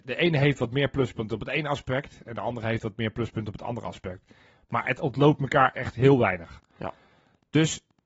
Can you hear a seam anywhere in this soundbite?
no; 0 cuts

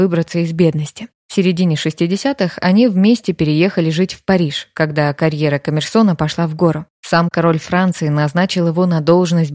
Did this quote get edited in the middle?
no; 0 cuts

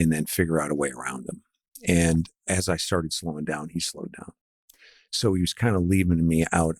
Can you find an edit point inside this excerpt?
no; 0 cuts

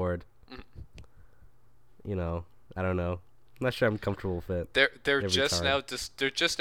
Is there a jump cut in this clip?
no; 0 cuts

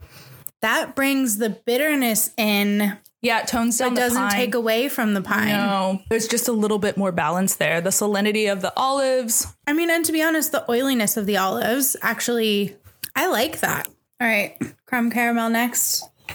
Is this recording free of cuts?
no; 1 cut; at 13.9 s

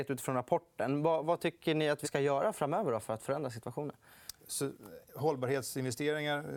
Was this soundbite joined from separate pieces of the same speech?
yes; 2 cuts; at 2.0 s, 4.4 s

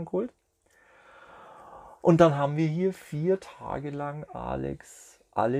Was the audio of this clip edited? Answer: no; 0 cuts

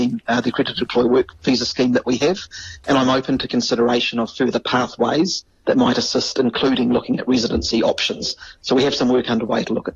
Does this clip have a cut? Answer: no; 0 cuts

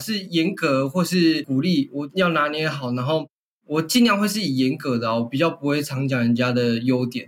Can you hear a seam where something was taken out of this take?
no; 0 cuts

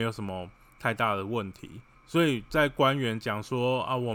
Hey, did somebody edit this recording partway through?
yes; 1 cut; at 1.9 s

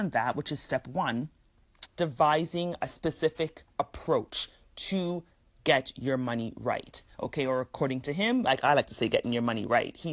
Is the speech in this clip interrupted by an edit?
yes; 1 cut; at 1.9 s

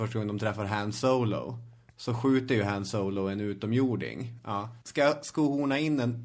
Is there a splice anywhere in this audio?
yes; 1 cut; at 4.4 s

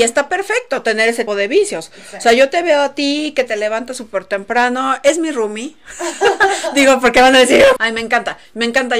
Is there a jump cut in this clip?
yes; 2 cuts; at 1.3 s, 7.8 s

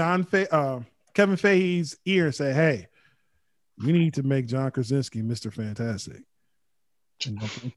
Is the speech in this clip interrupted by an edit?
no; 0 cuts

